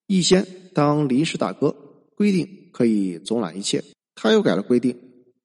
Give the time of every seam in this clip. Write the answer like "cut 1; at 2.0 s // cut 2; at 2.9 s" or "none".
cut 1; at 4.1 s